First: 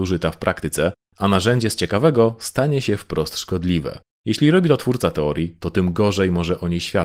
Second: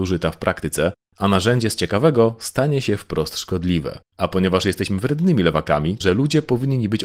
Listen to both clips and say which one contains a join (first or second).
second